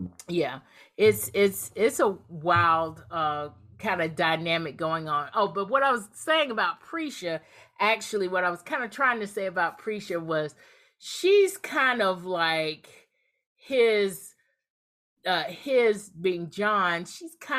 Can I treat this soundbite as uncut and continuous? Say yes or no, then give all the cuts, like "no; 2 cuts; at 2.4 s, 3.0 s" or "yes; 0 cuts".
yes; 0 cuts